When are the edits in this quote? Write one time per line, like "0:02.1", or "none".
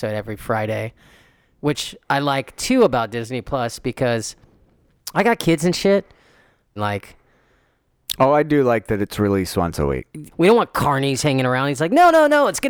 0:06.8
0:10.3

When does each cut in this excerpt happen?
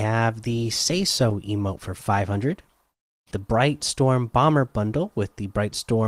0:03.3

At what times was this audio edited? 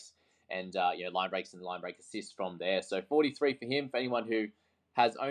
none

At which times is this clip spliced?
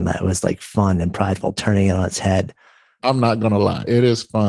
0:03.0

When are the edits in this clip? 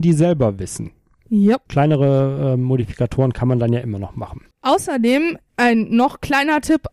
0:01.7
0:04.5

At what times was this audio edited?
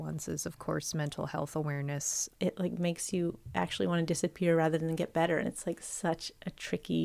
0:02.3
0:05.4

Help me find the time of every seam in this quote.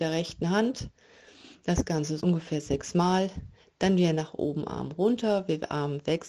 0:02.2

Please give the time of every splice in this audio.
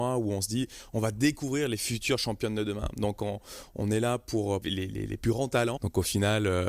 0:04.6
0:05.8

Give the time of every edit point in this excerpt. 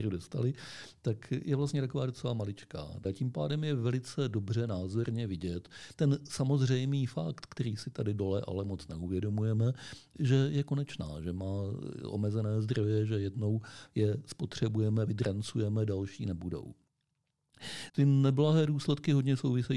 0:03.0
0:17.9

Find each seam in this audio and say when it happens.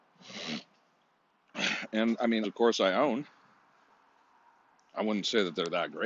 0:02.4

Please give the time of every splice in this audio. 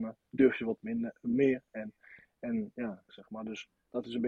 0:03.1

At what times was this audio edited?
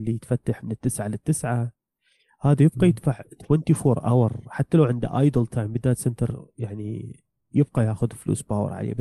none

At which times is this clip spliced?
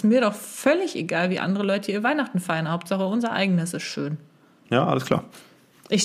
0:04.6

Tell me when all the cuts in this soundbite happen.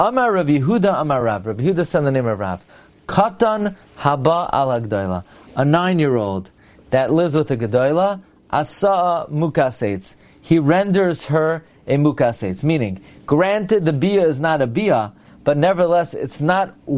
none

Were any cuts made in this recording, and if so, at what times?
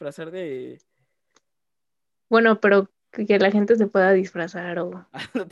0:02.1

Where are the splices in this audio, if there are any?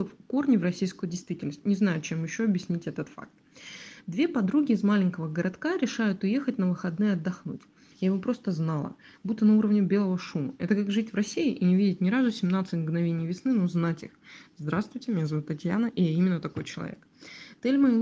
0:07.9

